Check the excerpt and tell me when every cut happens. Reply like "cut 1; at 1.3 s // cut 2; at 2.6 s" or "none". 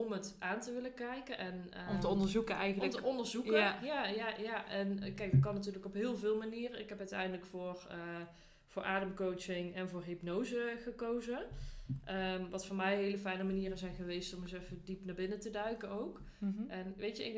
none